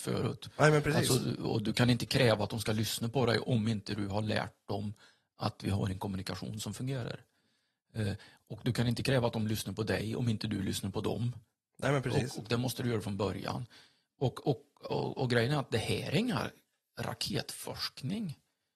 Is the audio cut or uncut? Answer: uncut